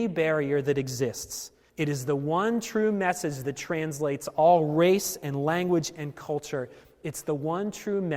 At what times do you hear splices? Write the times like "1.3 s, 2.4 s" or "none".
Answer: 1.7 s